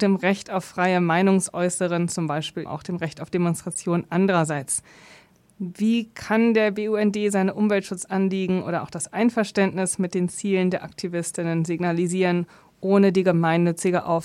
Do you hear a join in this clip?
yes; 1 cut; at 2.7 s

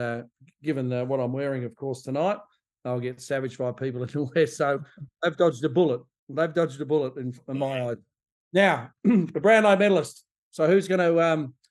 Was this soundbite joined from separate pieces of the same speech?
no; 0 cuts

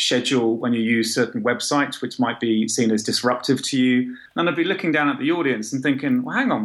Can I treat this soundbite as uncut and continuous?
no; 1 cut; at 4.3 s

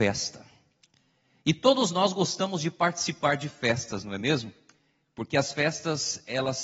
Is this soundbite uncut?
yes; 0 cuts

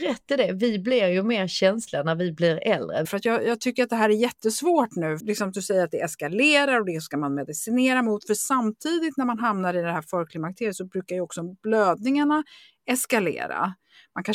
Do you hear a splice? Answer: yes; 2 cuts; at 3.0 s, 5.2 s

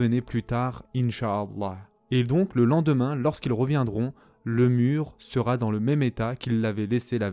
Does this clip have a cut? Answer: no; 0 cuts

